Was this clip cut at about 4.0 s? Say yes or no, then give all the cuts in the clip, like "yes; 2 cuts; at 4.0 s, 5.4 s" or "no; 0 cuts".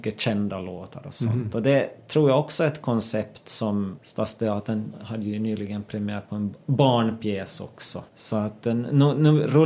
yes; 2 cuts; at 4.0 s, 8.1 s